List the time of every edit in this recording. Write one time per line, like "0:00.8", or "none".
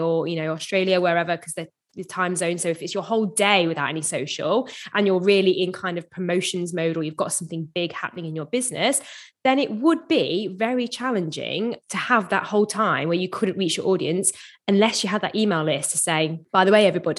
none

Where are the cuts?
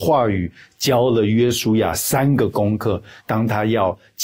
none

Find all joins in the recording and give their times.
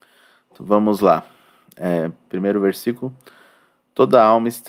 0:02.2

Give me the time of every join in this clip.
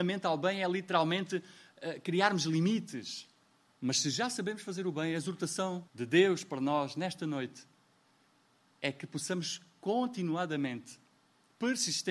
0:03.7
0:05.9

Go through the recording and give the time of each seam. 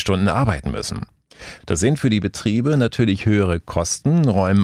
0:01.6

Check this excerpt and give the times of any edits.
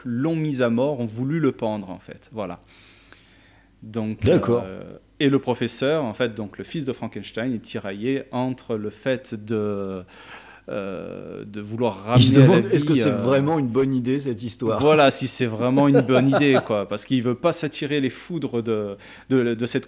none

